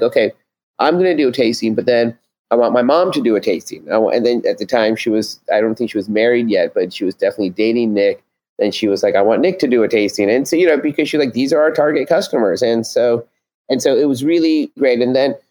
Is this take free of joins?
yes; 0 cuts

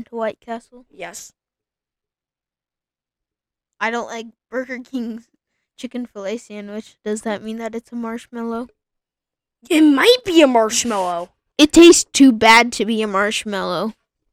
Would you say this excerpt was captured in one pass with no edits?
no; 1 cut; at 11.5 s

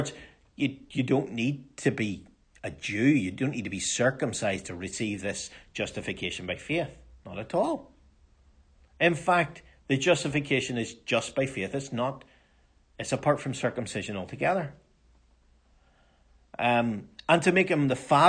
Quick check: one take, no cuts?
yes; 0 cuts

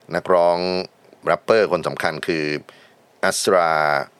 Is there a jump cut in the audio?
no; 0 cuts

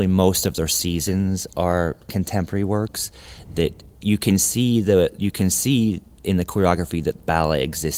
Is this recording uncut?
yes; 0 cuts

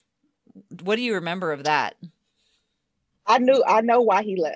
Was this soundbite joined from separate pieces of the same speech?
no; 0 cuts

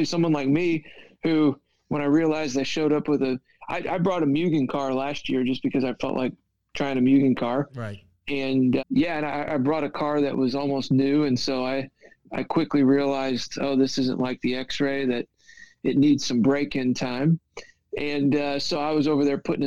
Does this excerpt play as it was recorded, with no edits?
no; 1 cut; at 8.8 s

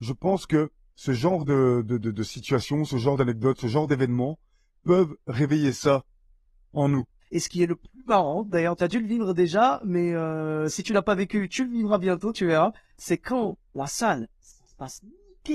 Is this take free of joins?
no; 1 cut; at 7.2 s

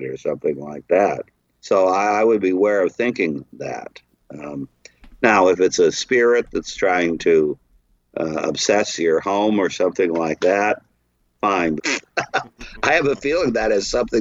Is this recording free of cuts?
no; 2 cuts; at 1.6 s, 11.8 s

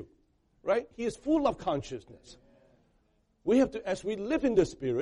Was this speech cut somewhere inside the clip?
yes; 1 cut; at 0.9 s

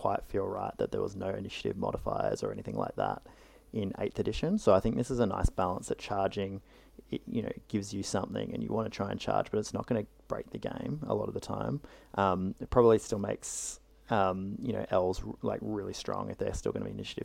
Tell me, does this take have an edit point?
no; 0 cuts

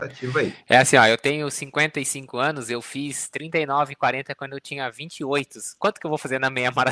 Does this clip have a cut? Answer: no; 0 cuts

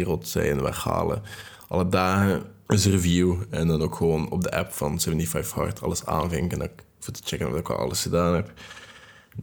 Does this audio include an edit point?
yes; 1 cut; at 2.7 s

